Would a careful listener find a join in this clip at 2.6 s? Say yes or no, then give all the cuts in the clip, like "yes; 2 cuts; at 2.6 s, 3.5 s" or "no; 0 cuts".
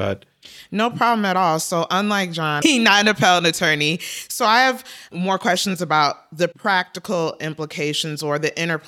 yes; 1 cut; at 2.6 s